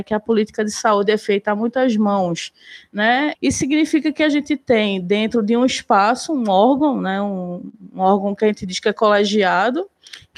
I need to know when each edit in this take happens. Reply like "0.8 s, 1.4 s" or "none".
3.3 s